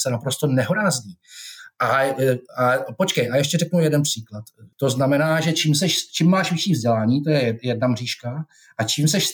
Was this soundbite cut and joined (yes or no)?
yes